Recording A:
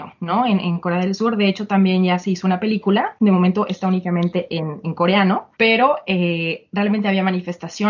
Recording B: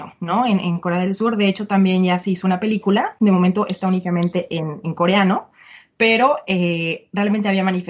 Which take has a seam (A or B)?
A